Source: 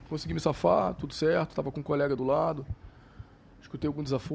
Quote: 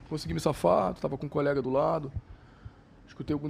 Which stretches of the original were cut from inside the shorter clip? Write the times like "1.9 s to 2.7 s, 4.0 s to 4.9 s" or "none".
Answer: 1.0 s to 1.5 s